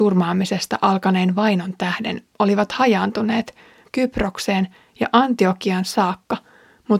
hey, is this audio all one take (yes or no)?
no